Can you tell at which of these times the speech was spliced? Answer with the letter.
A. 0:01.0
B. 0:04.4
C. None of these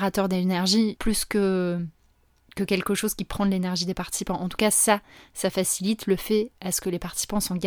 A